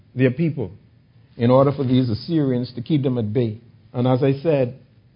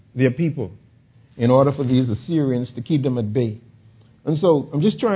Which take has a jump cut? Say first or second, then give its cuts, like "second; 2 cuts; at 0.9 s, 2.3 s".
first; 1 cut; at 3.9 s